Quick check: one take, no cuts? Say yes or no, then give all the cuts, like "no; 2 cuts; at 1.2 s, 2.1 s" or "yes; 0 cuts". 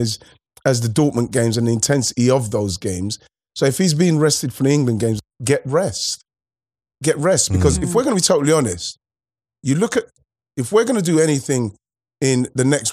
yes; 0 cuts